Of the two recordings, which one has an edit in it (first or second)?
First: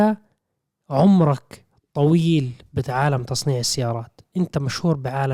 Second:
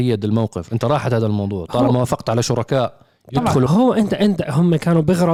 second